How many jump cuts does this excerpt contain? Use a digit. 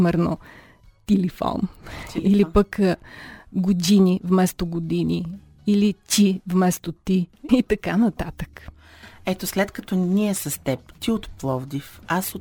1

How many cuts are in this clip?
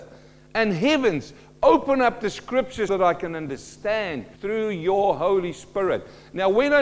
2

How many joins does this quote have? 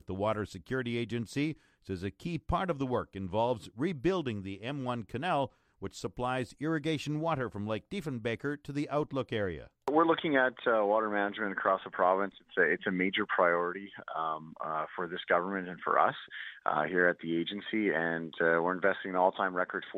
0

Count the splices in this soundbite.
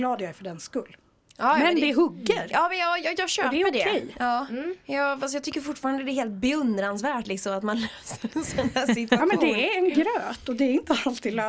0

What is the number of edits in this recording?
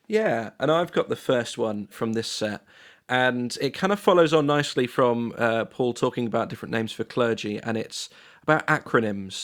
1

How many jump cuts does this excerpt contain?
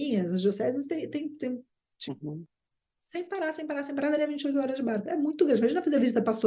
1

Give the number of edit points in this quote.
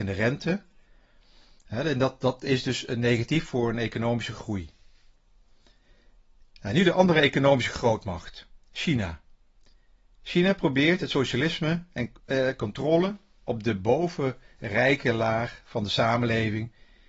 0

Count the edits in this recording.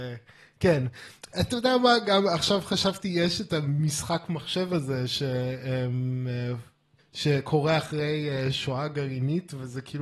1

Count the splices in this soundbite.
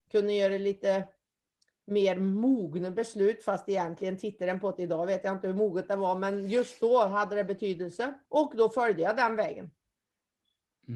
1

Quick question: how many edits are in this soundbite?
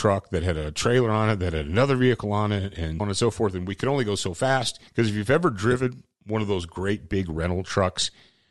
2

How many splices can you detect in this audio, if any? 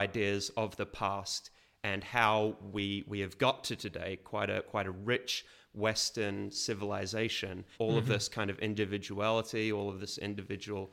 1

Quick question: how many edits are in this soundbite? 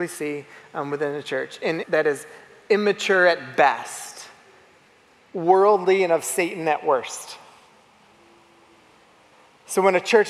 1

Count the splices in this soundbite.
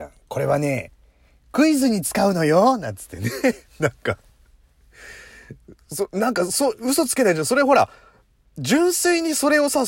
1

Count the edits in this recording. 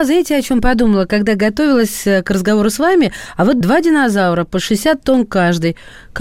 1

